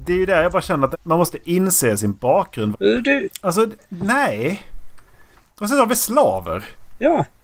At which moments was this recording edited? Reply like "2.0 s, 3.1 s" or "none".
0.9 s, 2.7 s